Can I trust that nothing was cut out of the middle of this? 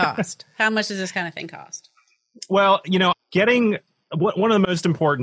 no; 1 cut; at 3.1 s

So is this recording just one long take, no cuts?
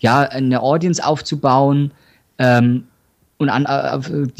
yes; 0 cuts

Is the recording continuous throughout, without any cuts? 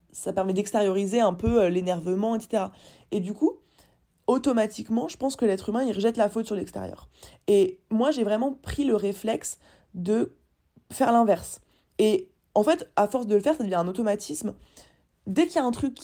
yes; 0 cuts

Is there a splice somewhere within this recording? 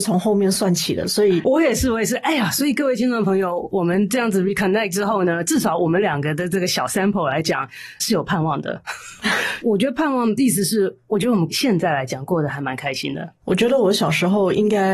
no; 0 cuts

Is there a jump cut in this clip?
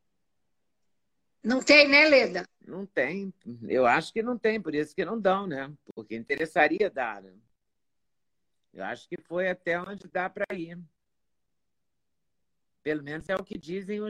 no; 0 cuts

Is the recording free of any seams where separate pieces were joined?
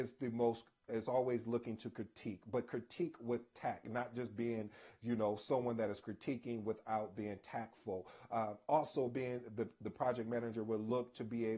yes; 0 cuts

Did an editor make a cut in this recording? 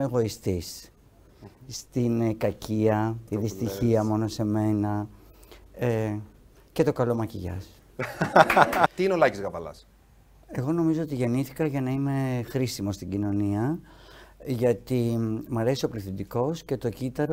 yes; 2 cuts; at 3.3 s, 8.9 s

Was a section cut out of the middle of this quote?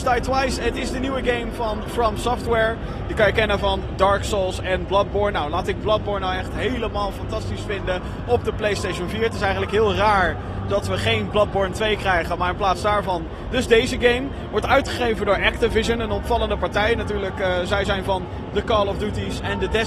no; 0 cuts

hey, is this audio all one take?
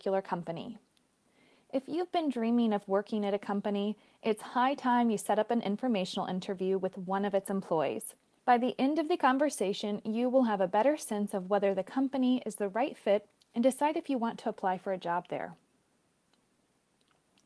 no; 1 cut; at 8.4 s

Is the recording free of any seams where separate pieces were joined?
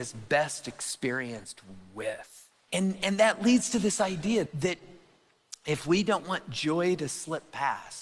no; 2 cuts; at 2.7 s, 4.5 s

